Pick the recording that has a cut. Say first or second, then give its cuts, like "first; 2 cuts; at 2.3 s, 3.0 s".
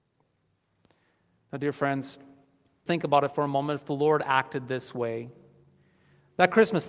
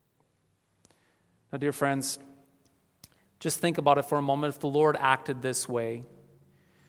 first; 1 cut; at 2.9 s